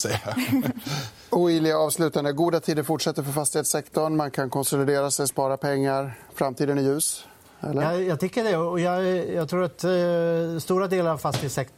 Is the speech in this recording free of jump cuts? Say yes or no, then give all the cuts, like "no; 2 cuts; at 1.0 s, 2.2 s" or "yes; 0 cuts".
yes; 0 cuts